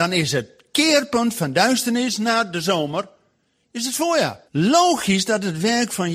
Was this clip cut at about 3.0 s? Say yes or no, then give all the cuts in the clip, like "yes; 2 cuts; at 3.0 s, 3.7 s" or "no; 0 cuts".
no; 1 cut; at 4.5 s